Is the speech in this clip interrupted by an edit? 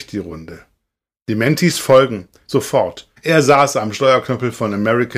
yes; 1 cut; at 3.2 s

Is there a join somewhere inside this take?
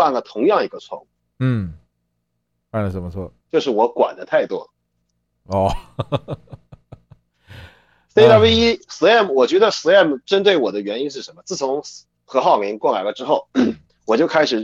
no; 0 cuts

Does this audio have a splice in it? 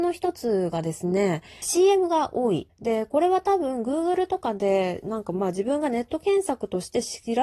yes; 2 cuts; at 1.6 s, 2.7 s

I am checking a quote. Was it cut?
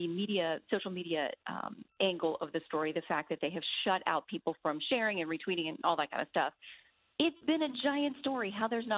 no; 0 cuts

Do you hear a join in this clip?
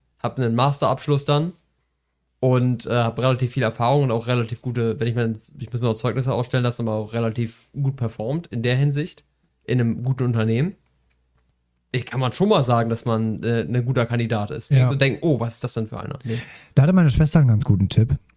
yes; 1 cut; at 14.7 s

